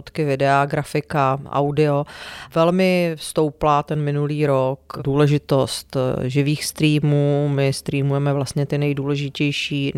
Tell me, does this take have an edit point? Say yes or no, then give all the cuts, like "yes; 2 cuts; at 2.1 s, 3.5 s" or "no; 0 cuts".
no; 0 cuts